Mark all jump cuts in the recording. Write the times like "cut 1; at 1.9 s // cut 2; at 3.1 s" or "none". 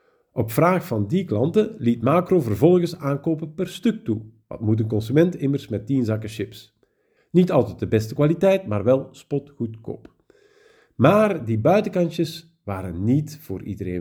cut 1; at 7.2 s